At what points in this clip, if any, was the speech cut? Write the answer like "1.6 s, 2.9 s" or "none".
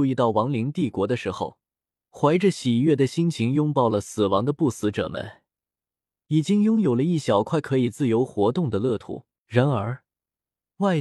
1.9 s, 9.4 s